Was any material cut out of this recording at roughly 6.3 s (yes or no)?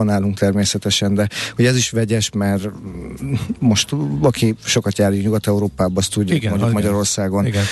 yes